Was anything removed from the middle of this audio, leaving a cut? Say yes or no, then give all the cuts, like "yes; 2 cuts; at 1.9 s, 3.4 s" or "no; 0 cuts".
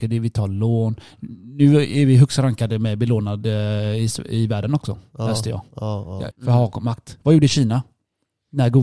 yes; 1 cut; at 6.3 s